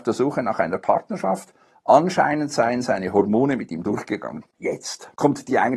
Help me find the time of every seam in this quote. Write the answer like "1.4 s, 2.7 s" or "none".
4.4 s